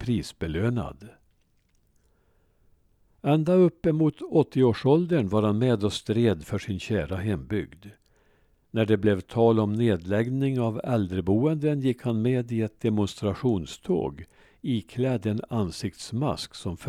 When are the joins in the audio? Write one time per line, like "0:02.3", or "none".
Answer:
none